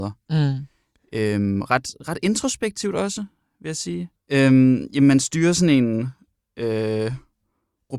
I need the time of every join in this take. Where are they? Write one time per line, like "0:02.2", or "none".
0:04.2